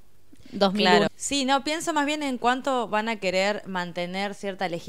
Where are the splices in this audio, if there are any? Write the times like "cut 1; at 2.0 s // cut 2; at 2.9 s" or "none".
cut 1; at 1.1 s